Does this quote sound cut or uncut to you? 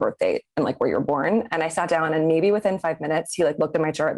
uncut